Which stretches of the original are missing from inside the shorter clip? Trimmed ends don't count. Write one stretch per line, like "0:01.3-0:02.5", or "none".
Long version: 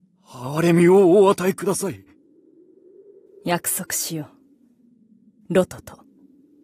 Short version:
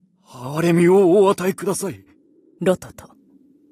0:02.6-0:05.5